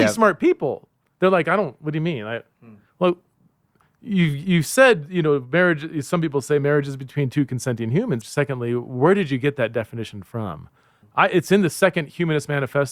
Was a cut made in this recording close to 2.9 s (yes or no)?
no